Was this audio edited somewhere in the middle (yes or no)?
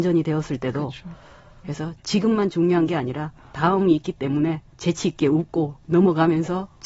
yes